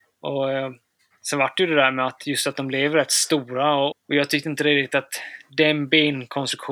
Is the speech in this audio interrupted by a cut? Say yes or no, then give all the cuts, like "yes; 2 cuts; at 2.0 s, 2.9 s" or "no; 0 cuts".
yes; 1 cut; at 3.9 s